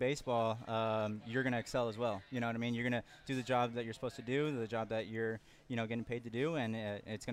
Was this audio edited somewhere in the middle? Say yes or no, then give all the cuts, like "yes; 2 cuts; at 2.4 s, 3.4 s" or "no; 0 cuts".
no; 0 cuts